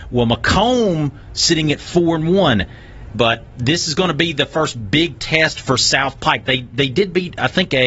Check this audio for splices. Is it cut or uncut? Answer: cut